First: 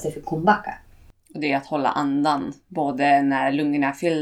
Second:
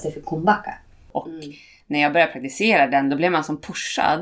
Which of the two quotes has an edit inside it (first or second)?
second